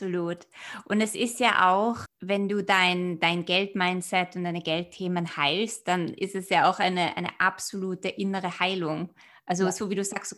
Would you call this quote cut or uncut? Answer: cut